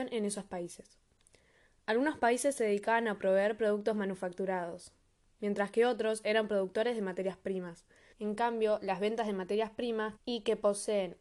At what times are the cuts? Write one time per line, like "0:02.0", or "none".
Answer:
0:08.1
0:10.2